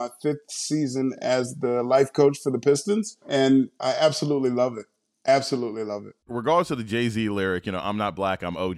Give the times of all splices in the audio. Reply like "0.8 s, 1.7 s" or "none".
6.3 s

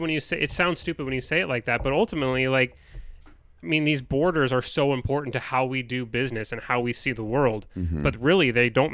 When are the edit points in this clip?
none

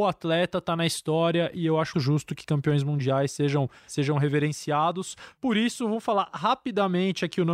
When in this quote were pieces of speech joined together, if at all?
1.9 s

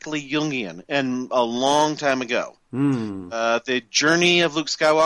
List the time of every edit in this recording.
none

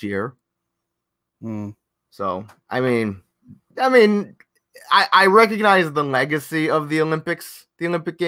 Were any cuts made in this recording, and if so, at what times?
3.7 s

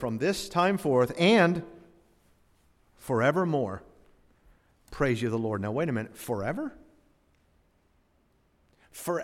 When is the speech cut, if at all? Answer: none

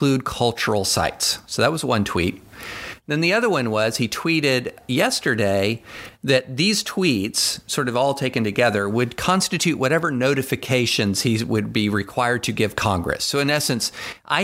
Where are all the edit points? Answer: none

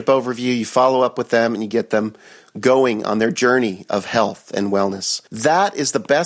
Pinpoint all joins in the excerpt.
5.3 s

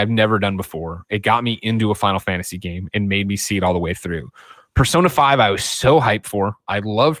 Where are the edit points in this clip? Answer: none

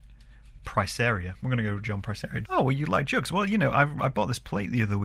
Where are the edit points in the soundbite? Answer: 2.4 s

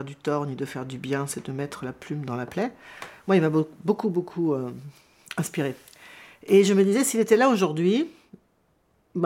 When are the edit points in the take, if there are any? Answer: none

